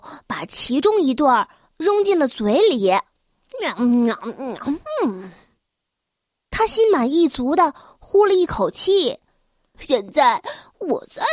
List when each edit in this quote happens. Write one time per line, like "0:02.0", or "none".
0:09.7